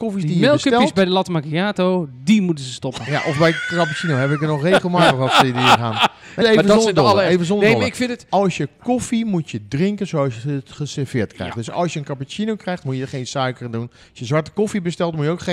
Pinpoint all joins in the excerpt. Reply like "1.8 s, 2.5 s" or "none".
6.4 s